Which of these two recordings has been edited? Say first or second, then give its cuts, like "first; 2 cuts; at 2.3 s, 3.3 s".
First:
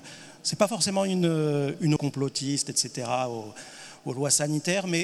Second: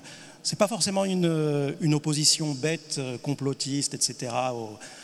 first; 1 cut; at 2.0 s